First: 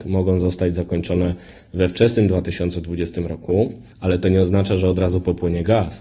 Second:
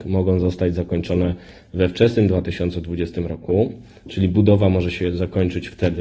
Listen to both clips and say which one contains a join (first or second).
first